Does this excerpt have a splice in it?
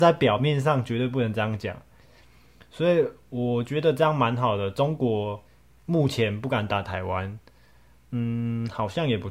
no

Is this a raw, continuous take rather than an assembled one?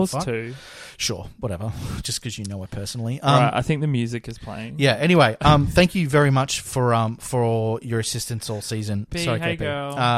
no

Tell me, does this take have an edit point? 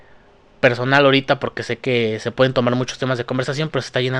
no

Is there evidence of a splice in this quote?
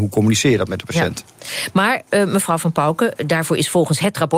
no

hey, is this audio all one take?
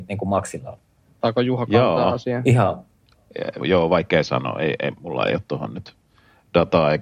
no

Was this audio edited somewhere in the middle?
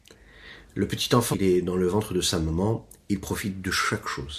yes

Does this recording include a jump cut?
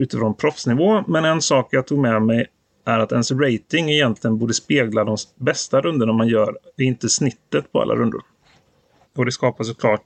yes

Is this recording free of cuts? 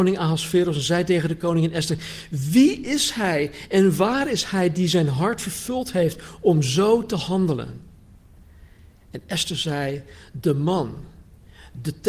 yes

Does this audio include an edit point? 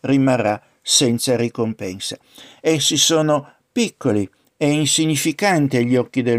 no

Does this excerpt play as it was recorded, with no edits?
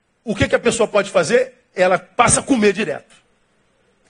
yes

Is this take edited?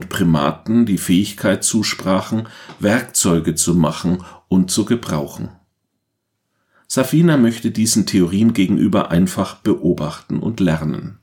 no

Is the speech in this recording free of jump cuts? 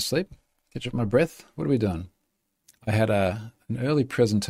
no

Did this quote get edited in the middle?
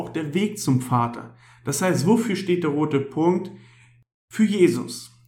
no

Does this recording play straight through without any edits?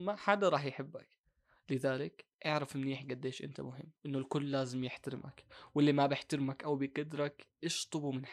no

